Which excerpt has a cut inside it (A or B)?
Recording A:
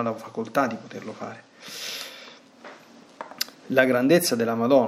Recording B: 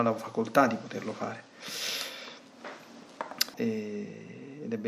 B